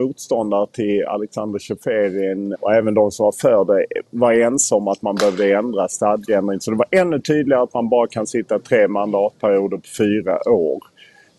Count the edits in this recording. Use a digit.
1